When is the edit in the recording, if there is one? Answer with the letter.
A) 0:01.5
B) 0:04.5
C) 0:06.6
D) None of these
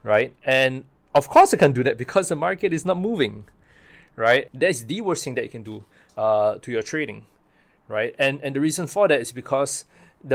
B